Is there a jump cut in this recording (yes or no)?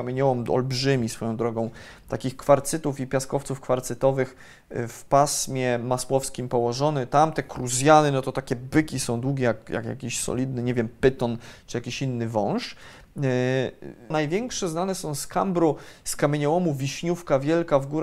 yes